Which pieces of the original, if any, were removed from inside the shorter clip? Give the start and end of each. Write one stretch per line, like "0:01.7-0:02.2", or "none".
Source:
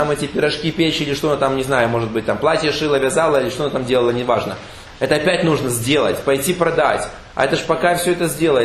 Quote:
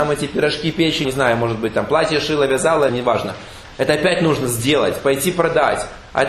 0:01.0-0:01.6
0:03.4-0:04.1